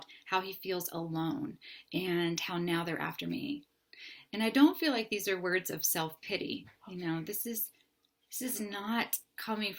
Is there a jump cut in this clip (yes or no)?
no